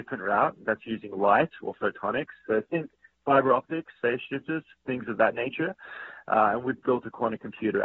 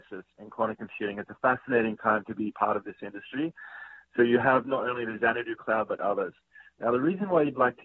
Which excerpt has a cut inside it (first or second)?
first